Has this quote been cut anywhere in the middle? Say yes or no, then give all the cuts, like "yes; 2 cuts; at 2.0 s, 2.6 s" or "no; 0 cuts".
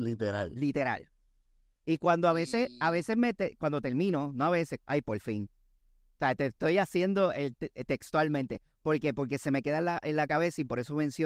yes; 1 cut; at 4.8 s